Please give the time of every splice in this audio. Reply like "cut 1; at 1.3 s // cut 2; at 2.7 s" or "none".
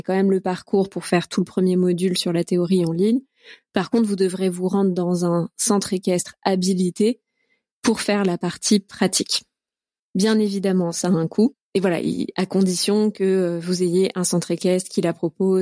none